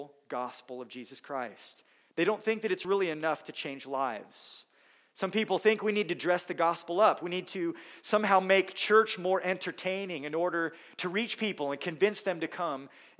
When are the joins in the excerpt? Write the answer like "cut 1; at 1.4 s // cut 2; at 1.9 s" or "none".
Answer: none